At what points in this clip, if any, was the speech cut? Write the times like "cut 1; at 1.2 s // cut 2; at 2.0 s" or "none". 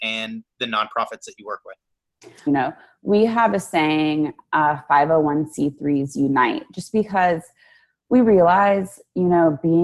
cut 1; at 2.5 s